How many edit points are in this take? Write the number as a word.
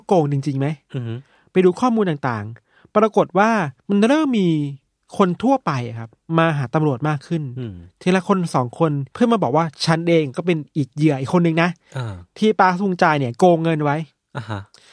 two